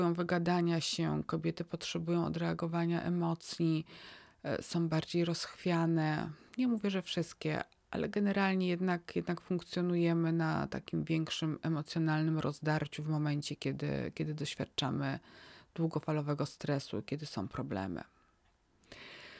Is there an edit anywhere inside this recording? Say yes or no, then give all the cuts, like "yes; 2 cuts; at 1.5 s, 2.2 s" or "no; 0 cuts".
no; 0 cuts